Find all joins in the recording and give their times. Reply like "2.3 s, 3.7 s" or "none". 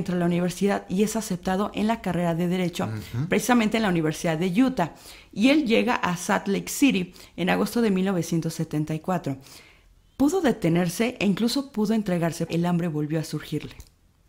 12.5 s